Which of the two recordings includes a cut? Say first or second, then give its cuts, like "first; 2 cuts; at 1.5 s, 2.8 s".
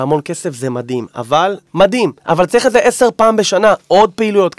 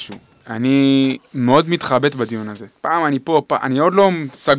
first; 1 cut; at 1.7 s